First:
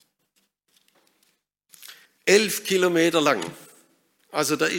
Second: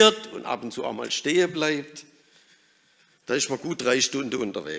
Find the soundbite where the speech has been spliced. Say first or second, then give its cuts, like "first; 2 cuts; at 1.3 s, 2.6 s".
first; 1 cut; at 2.1 s